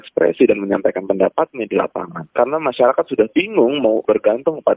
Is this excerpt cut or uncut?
uncut